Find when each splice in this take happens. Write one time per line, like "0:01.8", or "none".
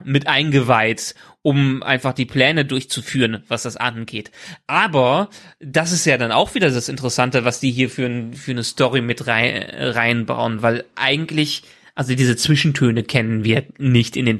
none

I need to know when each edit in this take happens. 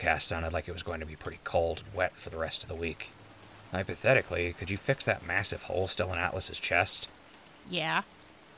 0:03.7

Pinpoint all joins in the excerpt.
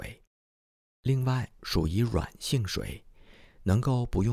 0:01.6

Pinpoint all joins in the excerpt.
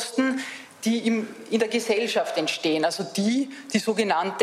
none

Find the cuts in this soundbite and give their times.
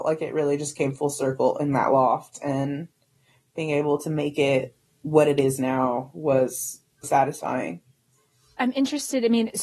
0:07.0

